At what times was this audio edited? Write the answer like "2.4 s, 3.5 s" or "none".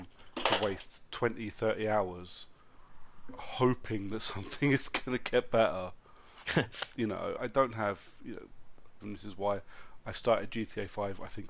7.4 s, 9.0 s